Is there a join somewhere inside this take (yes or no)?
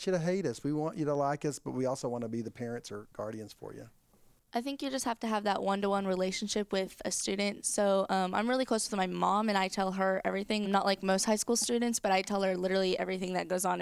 yes